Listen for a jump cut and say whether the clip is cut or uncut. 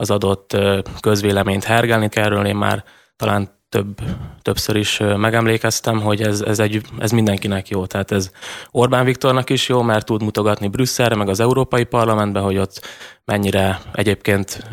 cut